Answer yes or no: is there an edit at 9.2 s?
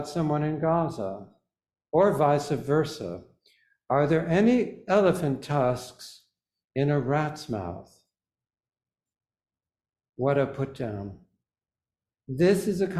no